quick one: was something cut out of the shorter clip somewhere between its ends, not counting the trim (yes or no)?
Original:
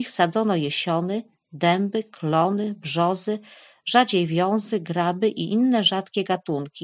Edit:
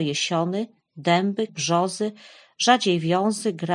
yes